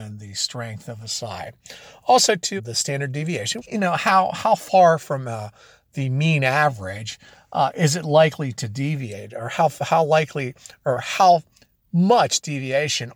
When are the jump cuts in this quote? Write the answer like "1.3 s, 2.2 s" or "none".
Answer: 2.6 s, 3.6 s